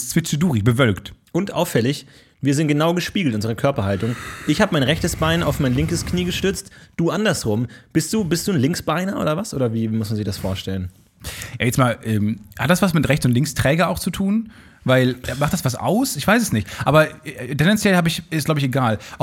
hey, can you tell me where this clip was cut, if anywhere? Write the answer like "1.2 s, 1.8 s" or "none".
none